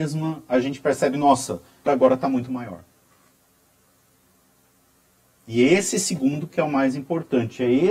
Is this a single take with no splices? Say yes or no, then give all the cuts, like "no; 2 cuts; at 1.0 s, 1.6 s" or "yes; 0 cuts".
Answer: no; 1 cut; at 1.9 s